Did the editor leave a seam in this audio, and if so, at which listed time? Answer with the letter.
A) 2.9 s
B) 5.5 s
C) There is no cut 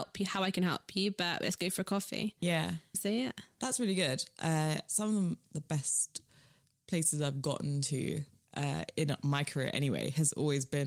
A